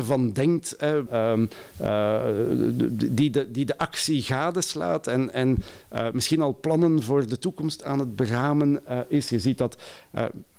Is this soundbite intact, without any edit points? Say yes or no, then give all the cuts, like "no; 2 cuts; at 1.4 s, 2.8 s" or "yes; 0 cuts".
no; 1 cut; at 1.1 s